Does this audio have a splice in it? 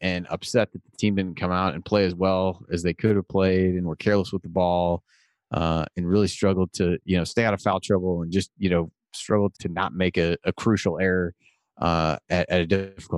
yes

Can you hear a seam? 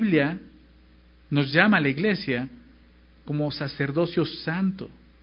no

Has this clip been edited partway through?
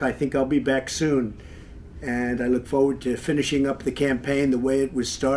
no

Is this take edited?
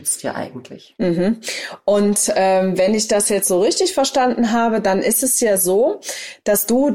no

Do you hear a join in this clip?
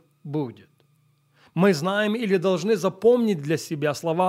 no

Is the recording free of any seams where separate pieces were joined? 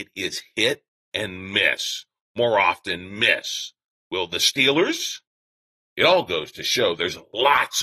no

